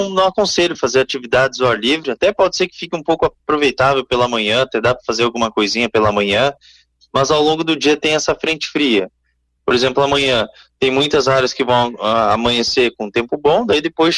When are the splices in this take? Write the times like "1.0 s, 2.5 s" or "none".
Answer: 9.6 s